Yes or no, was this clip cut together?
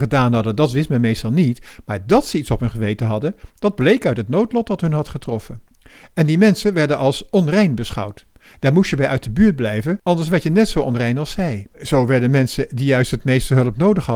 yes